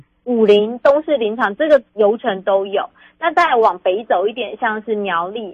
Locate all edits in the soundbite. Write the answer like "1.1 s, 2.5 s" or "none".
none